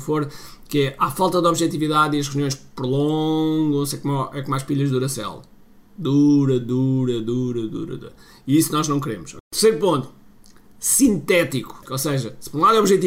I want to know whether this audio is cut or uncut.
uncut